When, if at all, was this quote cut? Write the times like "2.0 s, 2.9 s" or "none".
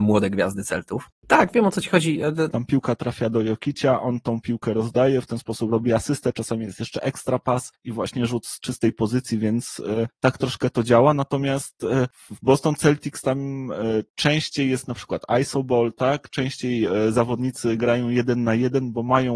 1.2 s, 2.5 s

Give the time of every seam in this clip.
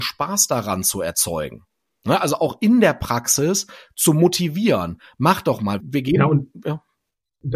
5.8 s

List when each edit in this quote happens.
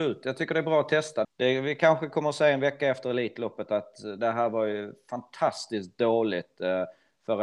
1.2 s

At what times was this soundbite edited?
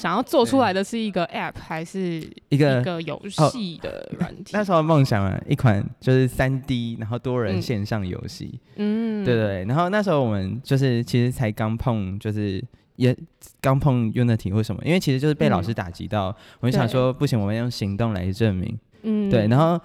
18.9 s

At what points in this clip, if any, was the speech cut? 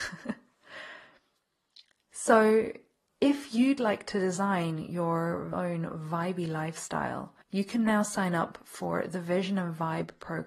5.5 s, 7.4 s

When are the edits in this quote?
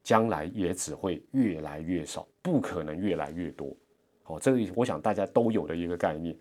none

